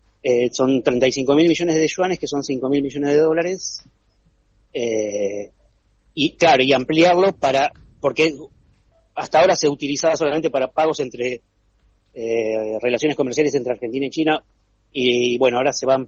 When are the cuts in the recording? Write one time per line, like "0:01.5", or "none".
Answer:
none